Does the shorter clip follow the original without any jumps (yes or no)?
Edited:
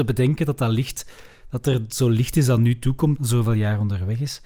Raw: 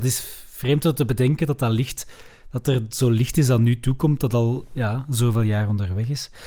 no